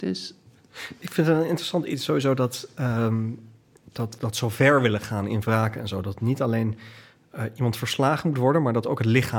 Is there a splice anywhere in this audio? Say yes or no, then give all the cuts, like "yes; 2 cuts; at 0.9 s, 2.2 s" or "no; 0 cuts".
yes; 1 cut; at 4.2 s